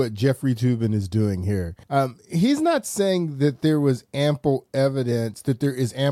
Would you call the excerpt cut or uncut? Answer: cut